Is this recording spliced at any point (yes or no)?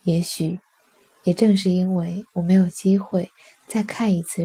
no